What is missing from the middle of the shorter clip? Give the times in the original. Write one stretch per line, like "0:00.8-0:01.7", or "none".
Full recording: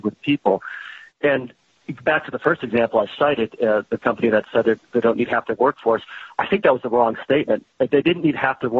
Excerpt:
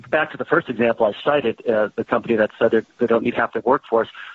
none